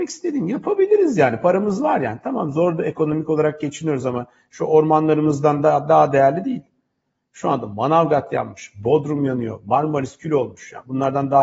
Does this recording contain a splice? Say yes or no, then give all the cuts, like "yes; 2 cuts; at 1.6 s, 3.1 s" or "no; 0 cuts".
no; 0 cuts